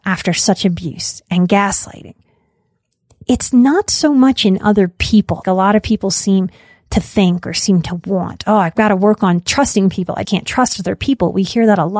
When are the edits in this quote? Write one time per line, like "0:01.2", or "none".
0:05.4
0:10.2